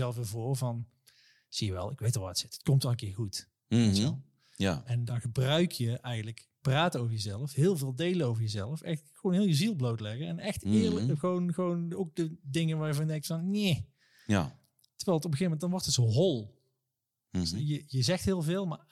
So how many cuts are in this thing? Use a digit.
0